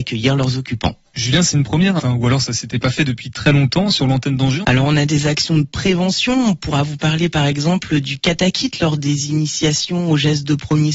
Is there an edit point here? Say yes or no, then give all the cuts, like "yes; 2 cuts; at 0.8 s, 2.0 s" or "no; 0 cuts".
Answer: yes; 2 cuts; at 2.0 s, 4.6 s